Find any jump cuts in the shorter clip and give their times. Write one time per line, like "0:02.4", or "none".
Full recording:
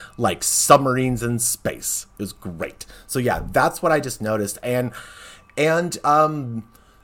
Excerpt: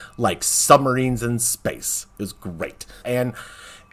0:03.0

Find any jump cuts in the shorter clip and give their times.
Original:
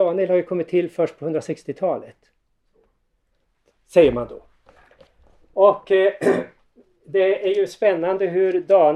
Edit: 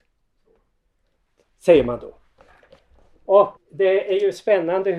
0:03.6

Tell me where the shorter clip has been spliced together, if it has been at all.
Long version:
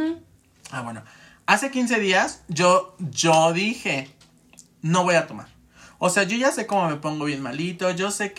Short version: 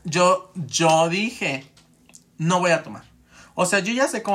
none

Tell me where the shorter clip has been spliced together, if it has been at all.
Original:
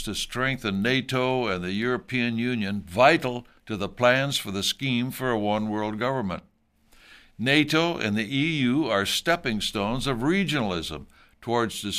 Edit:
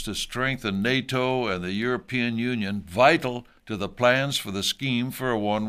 none

